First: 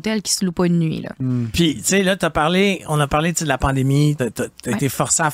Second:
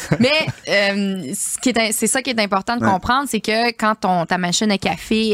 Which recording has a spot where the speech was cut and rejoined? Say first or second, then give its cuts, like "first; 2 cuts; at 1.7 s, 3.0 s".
first; 1 cut; at 4.2 s